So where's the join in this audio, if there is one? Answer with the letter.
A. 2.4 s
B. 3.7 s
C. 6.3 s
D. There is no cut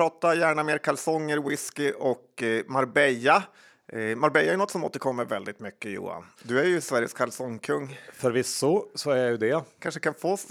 C